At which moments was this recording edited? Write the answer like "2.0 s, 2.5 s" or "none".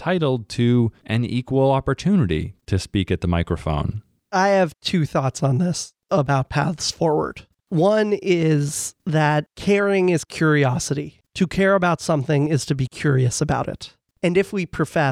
none

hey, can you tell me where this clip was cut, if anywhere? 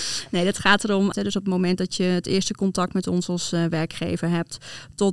1.1 s

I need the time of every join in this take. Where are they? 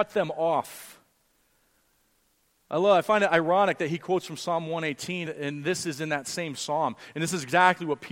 5.2 s

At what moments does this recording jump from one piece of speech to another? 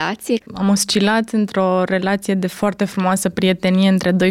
none

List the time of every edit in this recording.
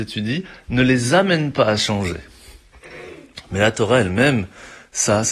none

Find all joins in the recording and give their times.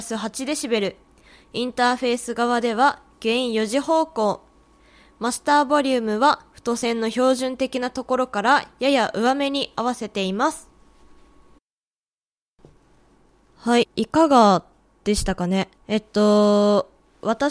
13.8 s, 15.8 s

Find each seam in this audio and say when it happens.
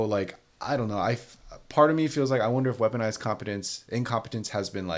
none

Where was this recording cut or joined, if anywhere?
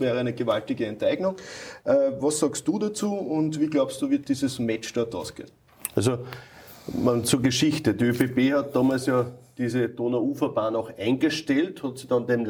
none

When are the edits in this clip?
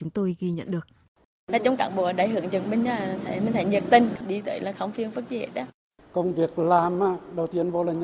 none

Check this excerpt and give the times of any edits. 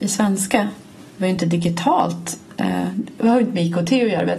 none

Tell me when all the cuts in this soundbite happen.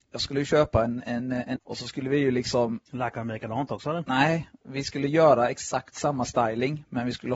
1.6 s

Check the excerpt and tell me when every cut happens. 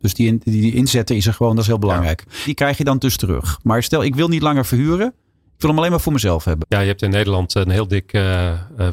2.5 s, 6.6 s

